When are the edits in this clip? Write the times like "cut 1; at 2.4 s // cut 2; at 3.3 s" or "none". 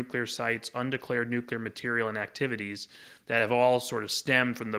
none